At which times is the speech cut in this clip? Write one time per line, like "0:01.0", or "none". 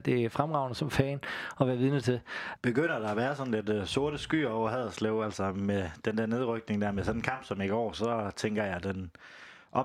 0:02.6